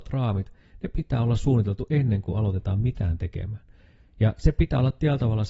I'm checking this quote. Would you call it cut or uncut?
uncut